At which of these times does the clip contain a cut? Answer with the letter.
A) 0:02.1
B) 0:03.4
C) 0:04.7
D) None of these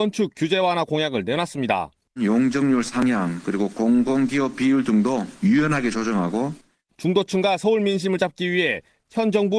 B